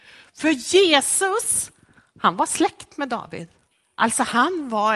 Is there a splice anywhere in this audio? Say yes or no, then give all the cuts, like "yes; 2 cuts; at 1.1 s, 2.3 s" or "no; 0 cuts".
no; 0 cuts